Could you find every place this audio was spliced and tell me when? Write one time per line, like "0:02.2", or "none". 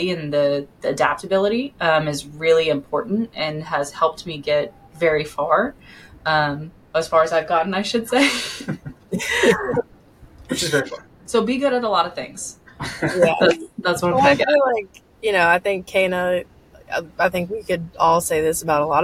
none